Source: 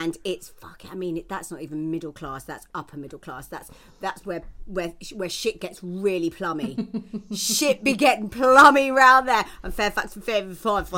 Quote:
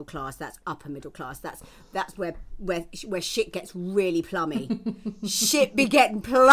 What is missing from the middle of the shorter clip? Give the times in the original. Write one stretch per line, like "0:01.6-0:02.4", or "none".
none